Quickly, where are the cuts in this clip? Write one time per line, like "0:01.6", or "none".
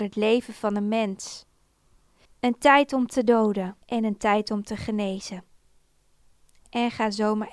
0:02.3
0:03.8